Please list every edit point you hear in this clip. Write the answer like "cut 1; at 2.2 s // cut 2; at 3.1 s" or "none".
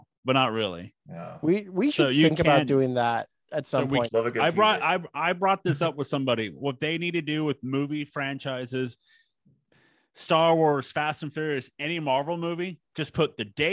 cut 1; at 4.1 s